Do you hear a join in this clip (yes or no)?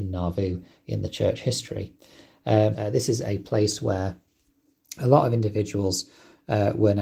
yes